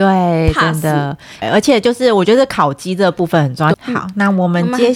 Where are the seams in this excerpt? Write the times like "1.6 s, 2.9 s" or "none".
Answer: 1.4 s, 3.7 s